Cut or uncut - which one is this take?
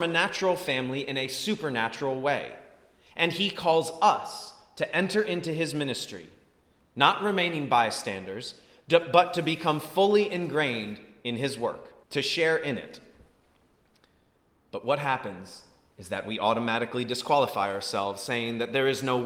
cut